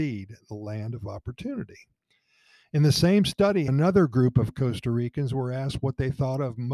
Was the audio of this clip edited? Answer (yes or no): yes